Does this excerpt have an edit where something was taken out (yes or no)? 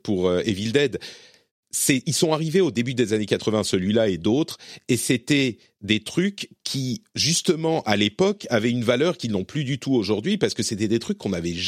no